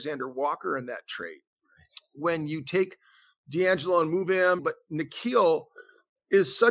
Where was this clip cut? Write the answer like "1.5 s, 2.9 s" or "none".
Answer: 4.6 s